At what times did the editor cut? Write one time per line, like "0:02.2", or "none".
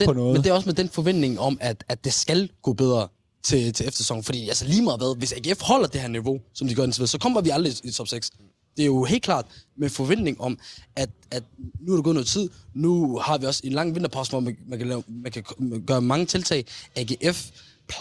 none